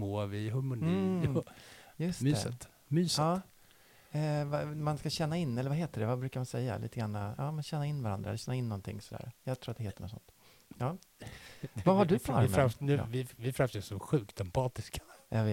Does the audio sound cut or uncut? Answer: uncut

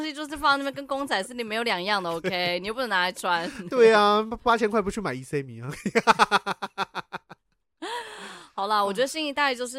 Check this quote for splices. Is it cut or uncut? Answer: uncut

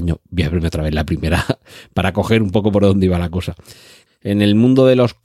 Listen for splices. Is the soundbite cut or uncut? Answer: cut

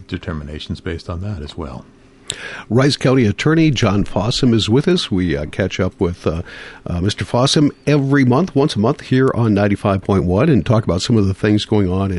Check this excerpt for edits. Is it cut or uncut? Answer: uncut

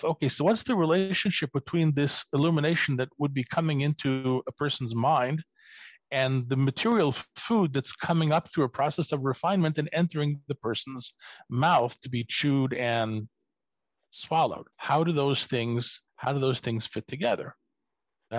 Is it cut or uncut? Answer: cut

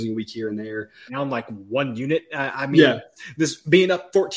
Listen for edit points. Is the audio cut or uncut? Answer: cut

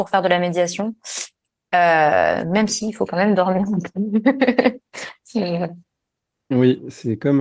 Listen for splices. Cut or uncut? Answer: uncut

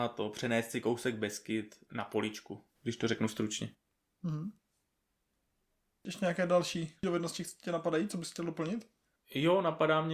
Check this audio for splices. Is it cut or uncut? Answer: uncut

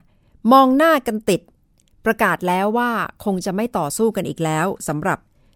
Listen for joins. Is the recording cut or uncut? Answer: uncut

